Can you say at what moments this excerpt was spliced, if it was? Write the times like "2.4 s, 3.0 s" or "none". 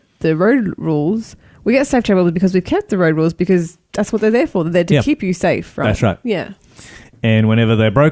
none